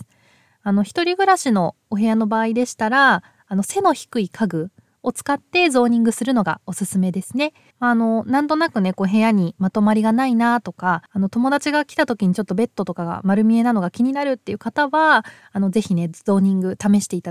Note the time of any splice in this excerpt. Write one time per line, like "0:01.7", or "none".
0:07.7
0:11.1

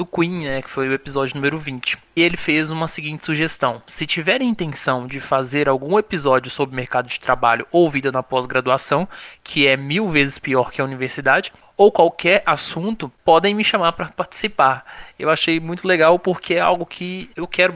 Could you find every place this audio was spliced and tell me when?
none

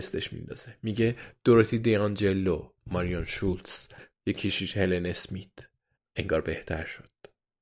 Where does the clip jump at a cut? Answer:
0:04.1
0:06.0

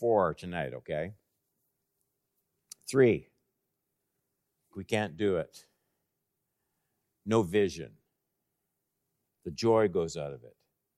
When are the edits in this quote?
0:04.7
0:09.3

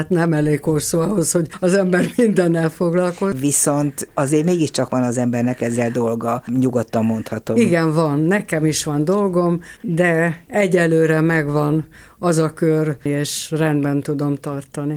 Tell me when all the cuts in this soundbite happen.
0:03.3
0:09.8
0:13.1

